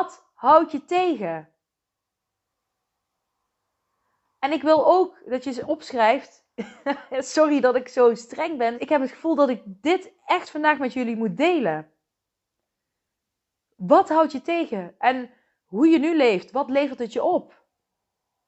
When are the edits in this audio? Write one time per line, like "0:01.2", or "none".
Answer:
0:08.7

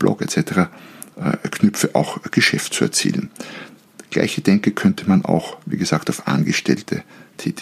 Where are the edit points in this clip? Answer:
none

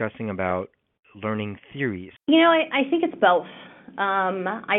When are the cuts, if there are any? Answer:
0:02.2

